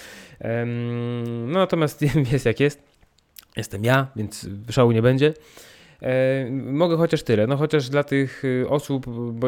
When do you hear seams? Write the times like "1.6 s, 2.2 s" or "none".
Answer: none